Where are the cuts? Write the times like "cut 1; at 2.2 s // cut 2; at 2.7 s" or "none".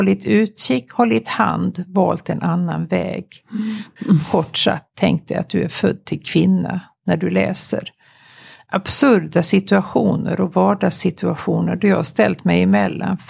cut 1; at 4.0 s